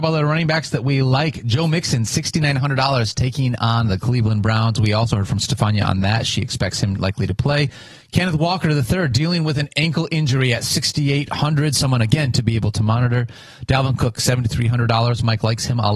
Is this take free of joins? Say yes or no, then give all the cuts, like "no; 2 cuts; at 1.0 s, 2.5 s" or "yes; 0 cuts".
yes; 0 cuts